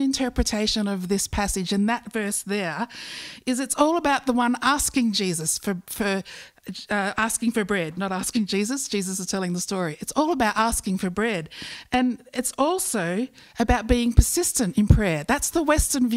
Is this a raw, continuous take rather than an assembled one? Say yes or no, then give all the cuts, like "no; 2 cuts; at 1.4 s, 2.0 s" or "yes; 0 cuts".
yes; 0 cuts